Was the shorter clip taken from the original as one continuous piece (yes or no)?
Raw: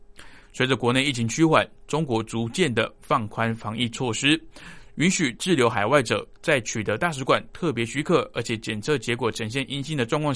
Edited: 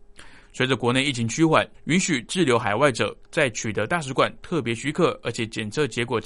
no